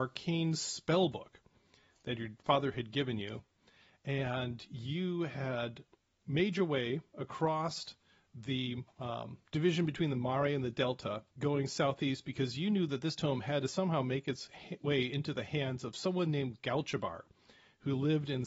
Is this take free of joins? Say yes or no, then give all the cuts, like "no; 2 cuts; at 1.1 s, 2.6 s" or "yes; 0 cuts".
no; 2 cuts; at 9.5 s, 11.3 s